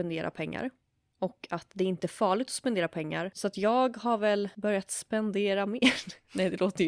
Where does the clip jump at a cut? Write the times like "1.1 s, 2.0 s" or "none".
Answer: 3.3 s